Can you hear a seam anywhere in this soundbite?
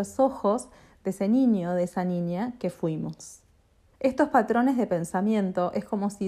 yes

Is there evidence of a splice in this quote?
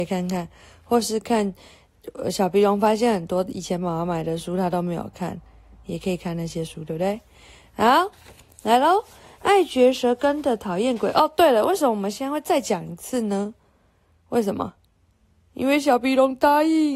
no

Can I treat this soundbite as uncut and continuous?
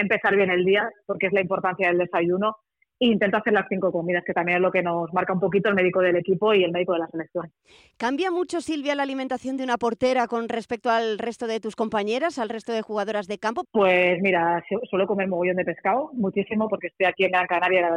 no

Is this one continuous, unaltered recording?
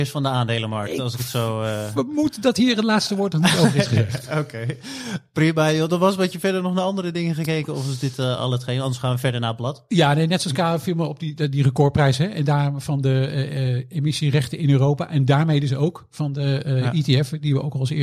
yes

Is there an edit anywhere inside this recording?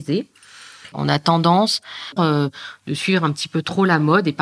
yes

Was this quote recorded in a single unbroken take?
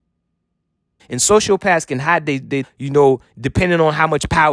no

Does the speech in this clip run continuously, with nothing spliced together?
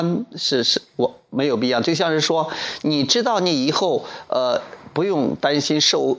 yes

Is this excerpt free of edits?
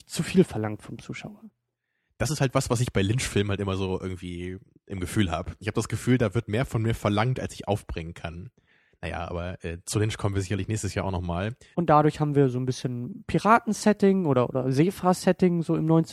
no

